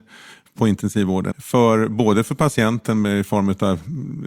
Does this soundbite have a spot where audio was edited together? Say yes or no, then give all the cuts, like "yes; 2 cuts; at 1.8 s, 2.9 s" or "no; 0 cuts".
yes; 1 cut; at 1.3 s